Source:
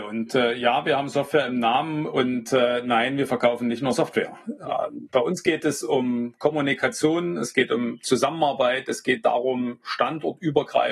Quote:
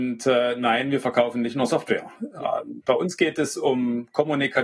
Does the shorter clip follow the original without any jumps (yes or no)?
yes